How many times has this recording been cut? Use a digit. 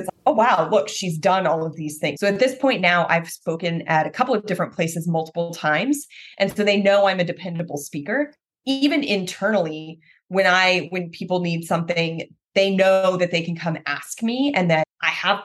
1